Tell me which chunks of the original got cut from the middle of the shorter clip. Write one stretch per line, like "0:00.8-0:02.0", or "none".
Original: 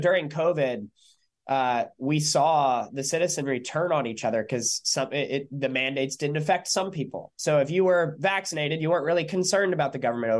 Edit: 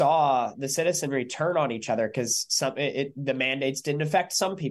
none